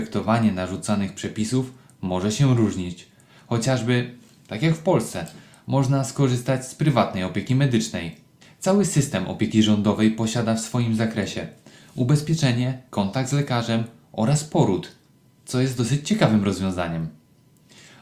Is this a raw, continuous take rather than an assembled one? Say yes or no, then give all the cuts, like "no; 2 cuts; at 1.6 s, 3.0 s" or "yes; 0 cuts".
no; 1 cut; at 12.9 s